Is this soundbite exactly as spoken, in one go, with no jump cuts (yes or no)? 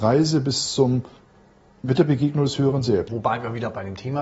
no